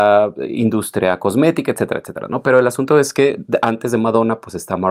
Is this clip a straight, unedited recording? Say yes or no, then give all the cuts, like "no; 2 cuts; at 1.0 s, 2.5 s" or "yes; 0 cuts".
yes; 0 cuts